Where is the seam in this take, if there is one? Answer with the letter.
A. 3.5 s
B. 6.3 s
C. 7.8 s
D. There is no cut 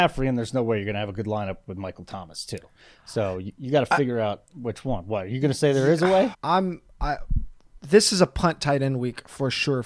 B